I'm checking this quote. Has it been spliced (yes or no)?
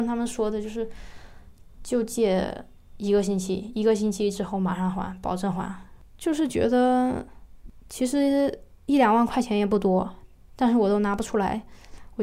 no